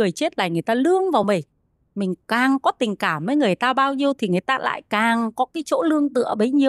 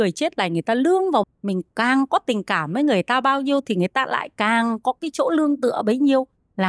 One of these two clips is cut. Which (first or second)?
second